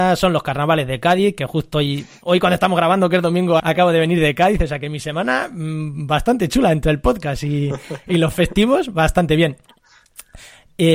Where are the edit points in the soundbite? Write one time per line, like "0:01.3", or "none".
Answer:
0:03.6